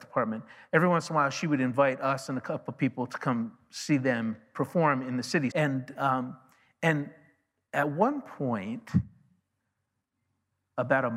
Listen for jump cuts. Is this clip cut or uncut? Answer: cut